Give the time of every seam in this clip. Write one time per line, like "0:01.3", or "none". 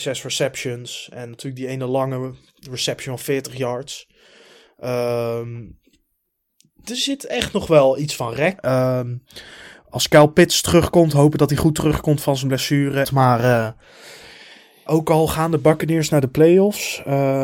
0:08.6
0:13.0
0:14.9